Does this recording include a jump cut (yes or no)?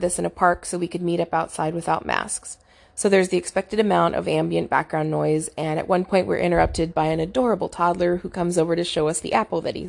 no